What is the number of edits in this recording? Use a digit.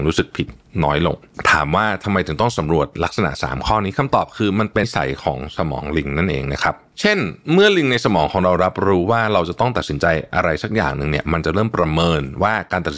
1